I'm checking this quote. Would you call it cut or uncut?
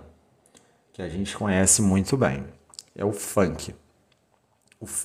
uncut